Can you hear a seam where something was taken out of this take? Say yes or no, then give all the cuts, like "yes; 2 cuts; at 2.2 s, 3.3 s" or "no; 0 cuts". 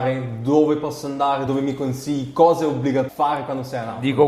yes; 2 cuts; at 1.5 s, 3.1 s